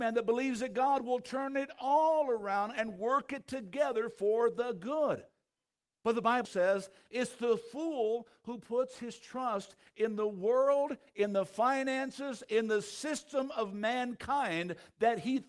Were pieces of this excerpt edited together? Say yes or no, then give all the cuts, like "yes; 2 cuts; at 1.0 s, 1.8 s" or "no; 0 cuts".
yes; 1 cut; at 6.4 s